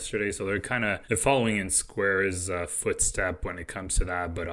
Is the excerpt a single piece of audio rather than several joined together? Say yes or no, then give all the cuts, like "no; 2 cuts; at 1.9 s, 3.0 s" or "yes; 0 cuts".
no; 1 cut; at 1.0 s